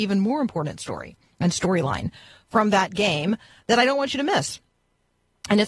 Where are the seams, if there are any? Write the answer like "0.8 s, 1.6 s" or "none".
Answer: none